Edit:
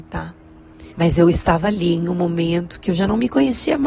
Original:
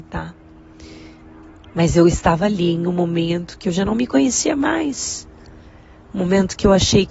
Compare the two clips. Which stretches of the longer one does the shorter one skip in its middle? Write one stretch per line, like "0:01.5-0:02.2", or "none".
0:00.9-0:01.7